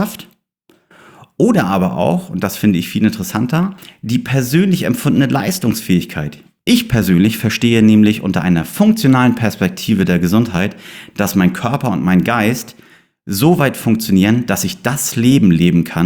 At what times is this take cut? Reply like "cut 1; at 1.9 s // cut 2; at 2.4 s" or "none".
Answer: none